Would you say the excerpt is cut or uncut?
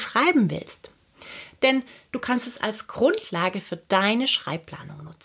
cut